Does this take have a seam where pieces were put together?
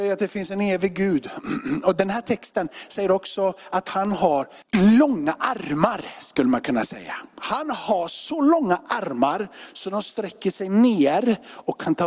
yes; 1 cut; at 4.6 s

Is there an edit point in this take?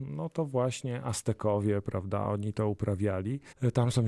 no; 0 cuts

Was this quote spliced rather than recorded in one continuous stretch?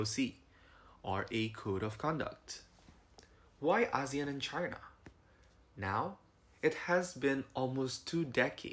yes; 1 cut; at 5.6 s

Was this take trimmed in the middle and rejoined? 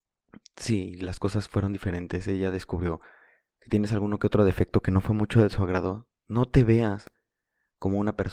no; 0 cuts

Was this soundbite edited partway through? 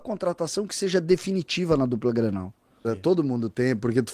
yes; 1 cut; at 2.8 s

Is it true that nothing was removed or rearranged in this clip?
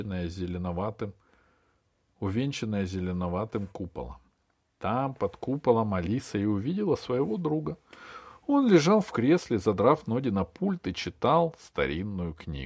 yes; 0 cuts

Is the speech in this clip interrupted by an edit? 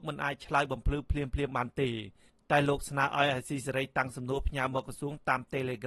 no; 0 cuts

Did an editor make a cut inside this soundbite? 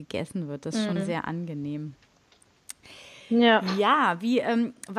no; 0 cuts

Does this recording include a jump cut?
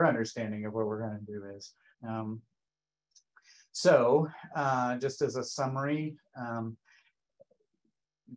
yes; 1 cut; at 1.9 s

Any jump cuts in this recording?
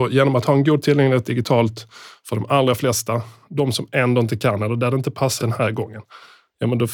yes; 1 cut; at 5.4 s

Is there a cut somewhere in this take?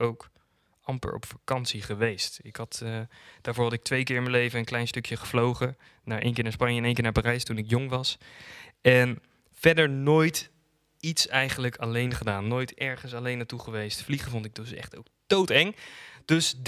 no; 0 cuts

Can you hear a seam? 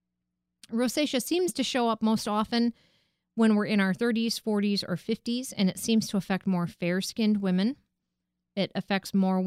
no; 0 cuts

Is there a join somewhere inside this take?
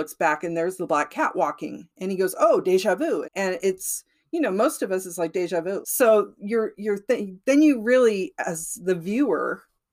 yes; 2 cuts; at 3.2 s, 5.8 s

